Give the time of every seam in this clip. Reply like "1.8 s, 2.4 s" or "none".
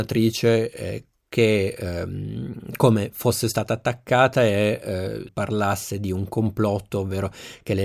5.3 s